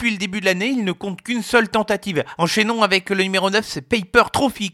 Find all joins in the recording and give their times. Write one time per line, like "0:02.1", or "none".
0:02.4